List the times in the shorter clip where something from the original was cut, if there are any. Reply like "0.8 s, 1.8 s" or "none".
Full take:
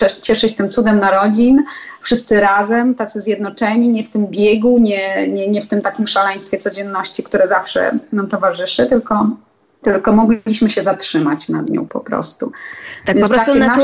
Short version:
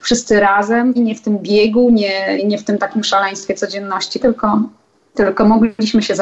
1.0 s, 2.4 s, 4.2 s